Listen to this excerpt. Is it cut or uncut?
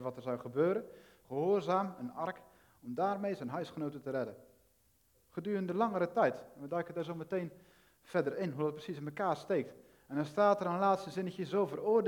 cut